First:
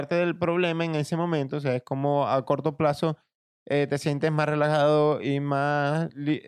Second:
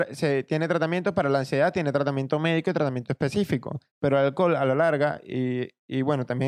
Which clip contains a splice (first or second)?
second